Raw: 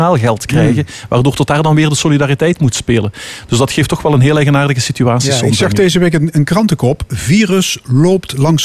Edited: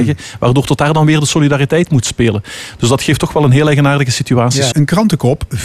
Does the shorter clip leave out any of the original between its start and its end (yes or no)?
yes